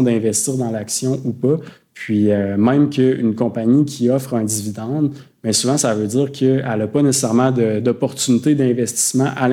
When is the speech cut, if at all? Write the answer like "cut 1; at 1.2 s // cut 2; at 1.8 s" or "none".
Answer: cut 1; at 1.9 s